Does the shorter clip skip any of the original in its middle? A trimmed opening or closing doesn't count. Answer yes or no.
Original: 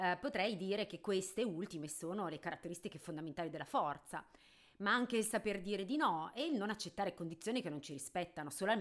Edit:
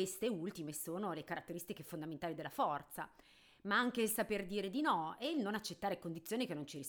no